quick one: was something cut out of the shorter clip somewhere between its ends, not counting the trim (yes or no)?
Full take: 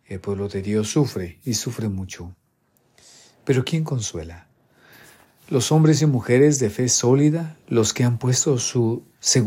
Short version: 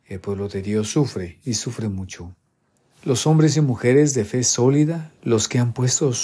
yes